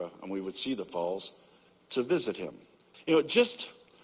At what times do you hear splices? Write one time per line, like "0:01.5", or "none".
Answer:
0:02.9